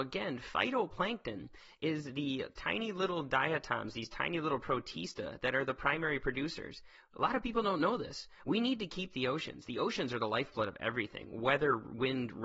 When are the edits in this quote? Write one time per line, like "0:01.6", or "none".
none